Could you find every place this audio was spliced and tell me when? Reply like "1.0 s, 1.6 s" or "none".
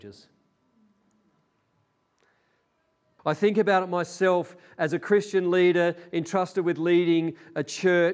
3.2 s